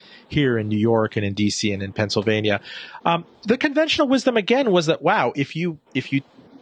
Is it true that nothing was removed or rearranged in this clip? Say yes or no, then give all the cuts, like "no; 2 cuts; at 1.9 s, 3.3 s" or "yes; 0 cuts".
yes; 0 cuts